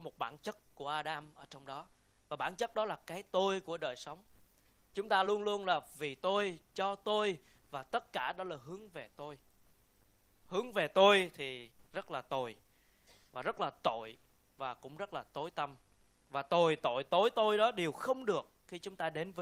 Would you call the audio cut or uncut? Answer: uncut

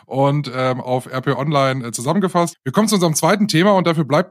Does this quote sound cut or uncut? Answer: cut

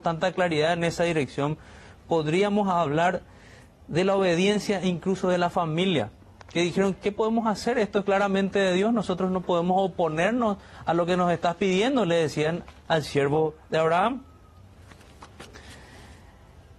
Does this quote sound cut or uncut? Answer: uncut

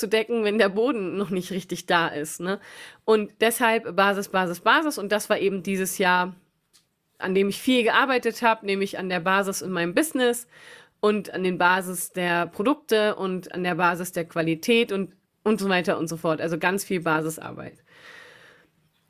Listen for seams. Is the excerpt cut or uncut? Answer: uncut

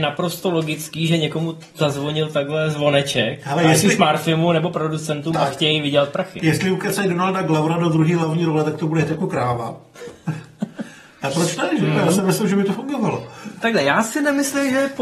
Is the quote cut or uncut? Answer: uncut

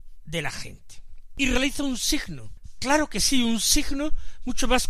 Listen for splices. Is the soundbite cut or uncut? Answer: uncut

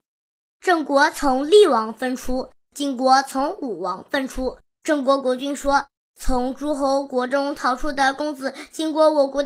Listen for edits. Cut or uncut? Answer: uncut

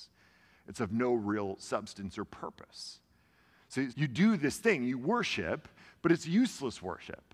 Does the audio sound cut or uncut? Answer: cut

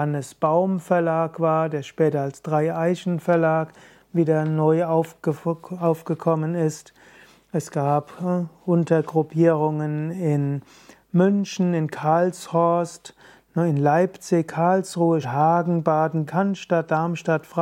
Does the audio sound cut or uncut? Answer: cut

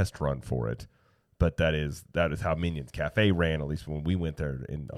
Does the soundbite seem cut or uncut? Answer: uncut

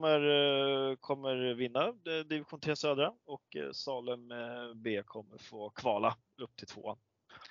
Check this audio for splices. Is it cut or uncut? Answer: uncut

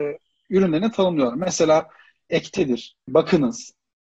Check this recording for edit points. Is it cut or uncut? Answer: cut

